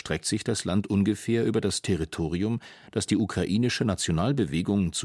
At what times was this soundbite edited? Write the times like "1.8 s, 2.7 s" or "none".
none